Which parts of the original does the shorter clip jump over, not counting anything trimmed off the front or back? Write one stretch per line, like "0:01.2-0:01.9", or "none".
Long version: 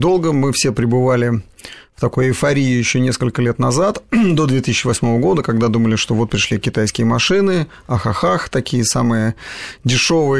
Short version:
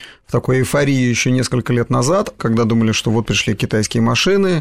0:04.1-0:05.4

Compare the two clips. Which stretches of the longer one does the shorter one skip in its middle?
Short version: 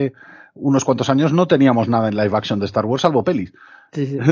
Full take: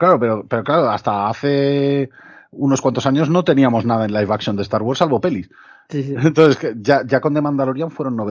none

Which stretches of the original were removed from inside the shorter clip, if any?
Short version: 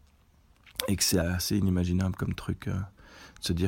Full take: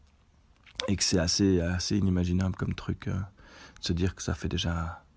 0:01.2-0:01.6

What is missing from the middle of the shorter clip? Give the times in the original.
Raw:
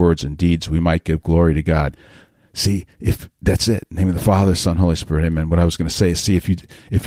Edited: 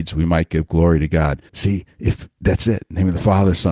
0:02.0-0:02.5

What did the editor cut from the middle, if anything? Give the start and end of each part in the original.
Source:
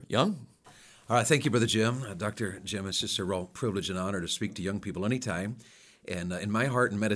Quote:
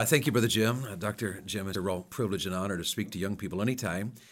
0:02.9-0:03.2

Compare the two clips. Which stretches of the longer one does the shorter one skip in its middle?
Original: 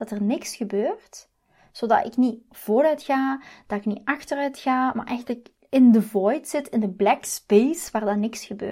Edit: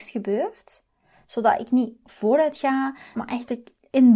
0:03.6-0:04.9

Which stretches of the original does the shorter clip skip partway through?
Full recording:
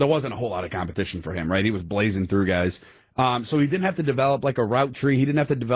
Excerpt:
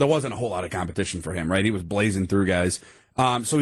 none

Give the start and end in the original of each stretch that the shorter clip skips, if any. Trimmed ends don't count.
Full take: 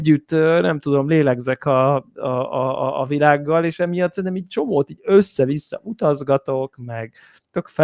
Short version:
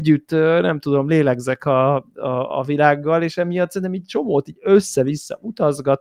0:02.5-0:02.9

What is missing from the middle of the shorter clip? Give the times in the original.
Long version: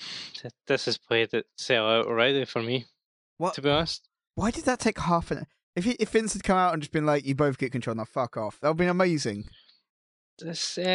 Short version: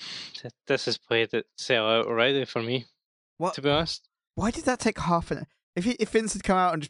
none

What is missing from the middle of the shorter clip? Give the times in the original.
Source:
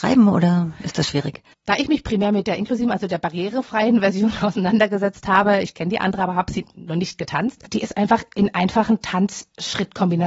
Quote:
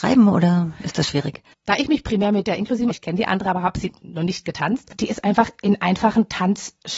0:02.9-0:05.6

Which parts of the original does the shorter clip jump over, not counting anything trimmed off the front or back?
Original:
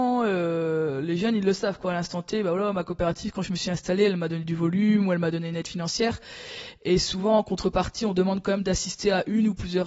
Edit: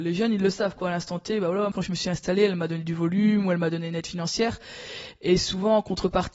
0:02.7-0:03.3

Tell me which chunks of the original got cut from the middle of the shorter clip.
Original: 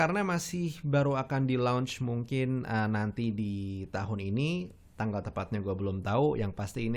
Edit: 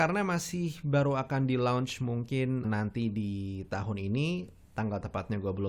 0:02.6-0:02.9

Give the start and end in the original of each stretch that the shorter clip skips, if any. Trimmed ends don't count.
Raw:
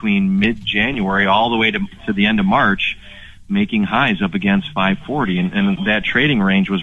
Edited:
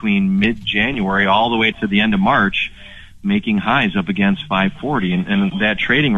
0:01.7-0:02.0

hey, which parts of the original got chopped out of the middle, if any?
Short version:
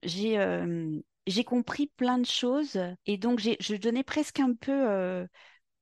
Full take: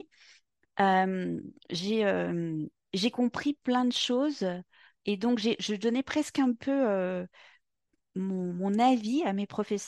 0:04.7-0:05.0

